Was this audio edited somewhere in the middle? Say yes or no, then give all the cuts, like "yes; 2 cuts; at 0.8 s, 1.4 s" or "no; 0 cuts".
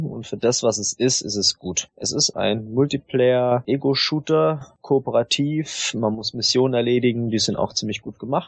yes; 1 cut; at 2.3 s